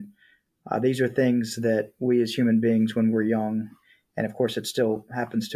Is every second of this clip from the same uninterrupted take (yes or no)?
yes